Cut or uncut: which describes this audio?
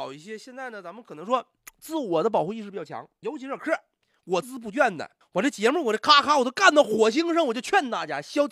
cut